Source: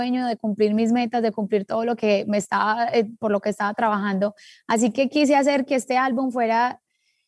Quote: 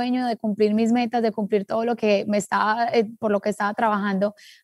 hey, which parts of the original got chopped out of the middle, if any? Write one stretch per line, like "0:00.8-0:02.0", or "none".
none